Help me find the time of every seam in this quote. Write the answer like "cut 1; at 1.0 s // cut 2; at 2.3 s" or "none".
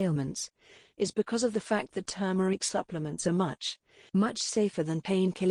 cut 1; at 4.1 s